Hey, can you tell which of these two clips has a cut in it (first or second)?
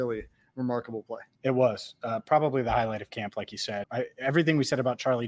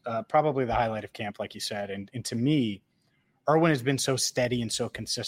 first